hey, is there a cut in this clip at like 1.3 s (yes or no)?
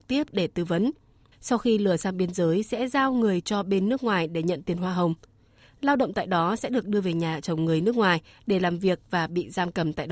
yes